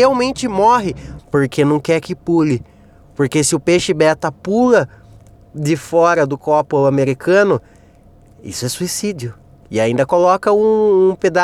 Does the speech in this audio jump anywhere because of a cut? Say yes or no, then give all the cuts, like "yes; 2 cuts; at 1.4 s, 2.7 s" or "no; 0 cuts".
yes; 2 cuts; at 1.2 s, 9.6 s